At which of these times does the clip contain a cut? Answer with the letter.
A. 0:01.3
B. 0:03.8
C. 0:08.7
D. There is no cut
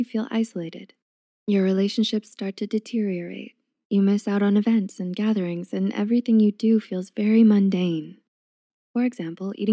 C